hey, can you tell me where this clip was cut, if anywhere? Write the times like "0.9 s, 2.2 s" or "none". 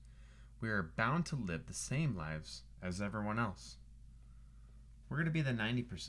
5.0 s